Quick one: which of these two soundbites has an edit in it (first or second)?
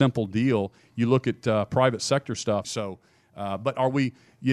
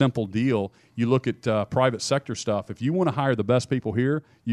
first